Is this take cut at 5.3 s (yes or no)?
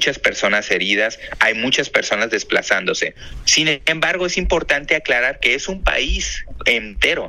no